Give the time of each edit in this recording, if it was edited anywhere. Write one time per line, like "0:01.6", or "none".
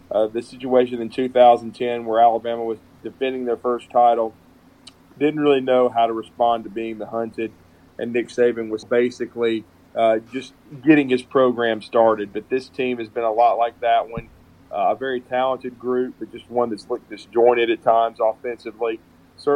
0:08.8